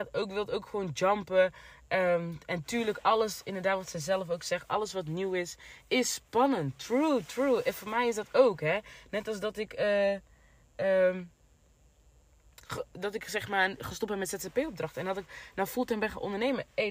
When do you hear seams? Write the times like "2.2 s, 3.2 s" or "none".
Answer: none